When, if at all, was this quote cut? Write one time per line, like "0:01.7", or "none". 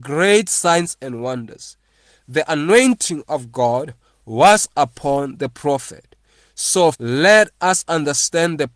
0:06.9